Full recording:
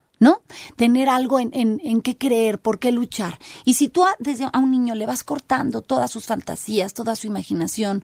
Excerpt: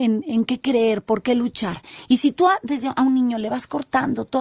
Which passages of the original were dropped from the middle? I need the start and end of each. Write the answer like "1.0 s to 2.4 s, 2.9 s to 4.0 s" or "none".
none

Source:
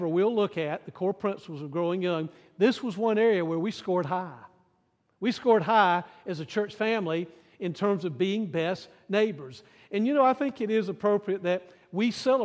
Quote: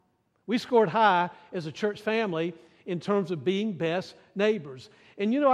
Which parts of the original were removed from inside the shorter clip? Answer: none

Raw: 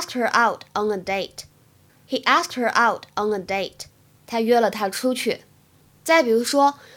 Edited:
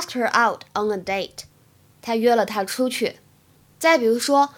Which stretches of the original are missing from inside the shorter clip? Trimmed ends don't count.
1.9 s to 4.1 s

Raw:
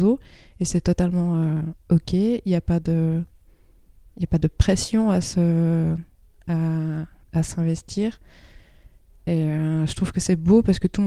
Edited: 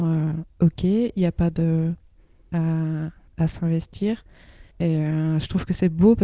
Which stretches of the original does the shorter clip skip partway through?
3.8 s to 6.4 s, 8.7 s to 9.2 s

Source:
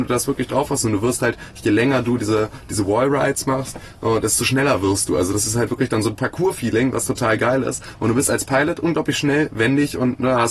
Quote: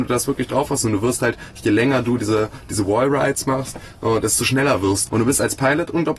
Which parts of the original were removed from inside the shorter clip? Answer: 5.1 s to 8.0 s

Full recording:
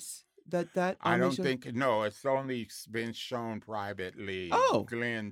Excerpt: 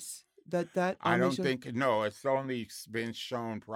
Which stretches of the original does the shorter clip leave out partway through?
none

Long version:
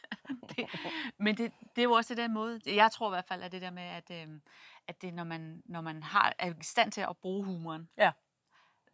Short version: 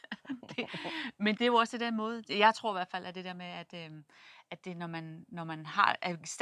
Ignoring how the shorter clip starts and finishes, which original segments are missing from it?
1.4 s to 1.7 s

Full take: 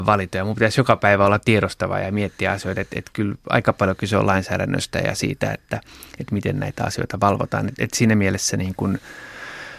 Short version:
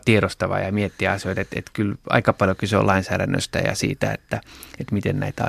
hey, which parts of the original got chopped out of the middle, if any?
none

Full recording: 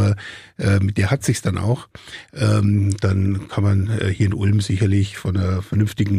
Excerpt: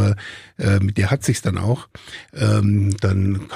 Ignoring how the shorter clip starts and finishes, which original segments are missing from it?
none

